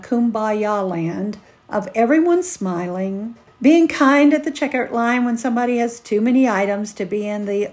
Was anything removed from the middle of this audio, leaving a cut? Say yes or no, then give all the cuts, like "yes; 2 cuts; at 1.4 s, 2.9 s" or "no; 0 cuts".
yes; 1 cut; at 3.5 s